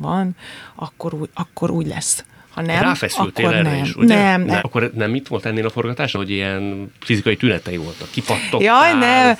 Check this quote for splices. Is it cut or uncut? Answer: cut